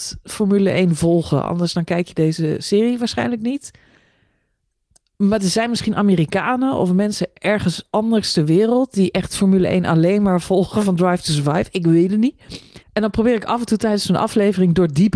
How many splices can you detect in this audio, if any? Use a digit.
1